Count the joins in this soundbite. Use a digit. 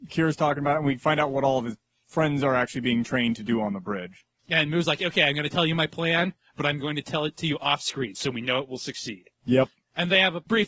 0